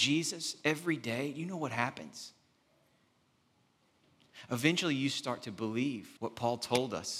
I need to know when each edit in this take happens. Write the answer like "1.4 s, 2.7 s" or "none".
6.2 s